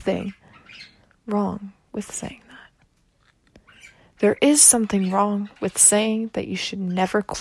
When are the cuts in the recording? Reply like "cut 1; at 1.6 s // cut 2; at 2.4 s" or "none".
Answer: none